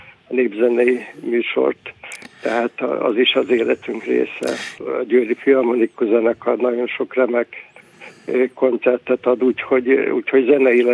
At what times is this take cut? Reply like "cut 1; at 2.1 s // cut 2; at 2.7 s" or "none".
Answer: cut 1; at 4.8 s